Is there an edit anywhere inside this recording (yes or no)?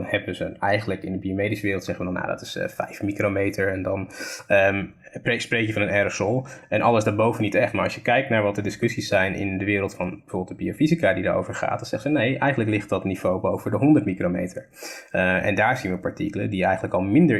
no